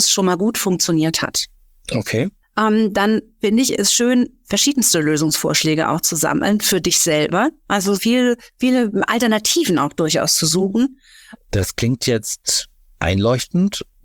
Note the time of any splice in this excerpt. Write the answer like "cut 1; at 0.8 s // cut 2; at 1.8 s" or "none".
cut 1; at 8.0 s // cut 2; at 11.3 s